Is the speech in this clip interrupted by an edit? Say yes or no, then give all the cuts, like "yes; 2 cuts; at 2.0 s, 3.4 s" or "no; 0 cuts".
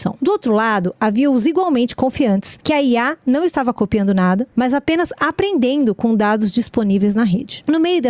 yes; 1 cut; at 2.6 s